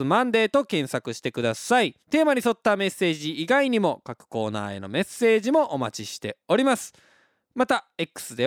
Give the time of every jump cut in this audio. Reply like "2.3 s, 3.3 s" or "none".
2.0 s